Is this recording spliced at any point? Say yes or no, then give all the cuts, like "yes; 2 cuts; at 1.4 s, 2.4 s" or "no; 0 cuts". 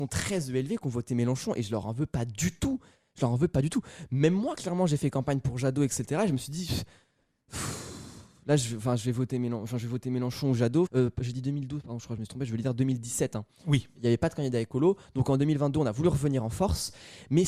yes; 1 cut; at 10.9 s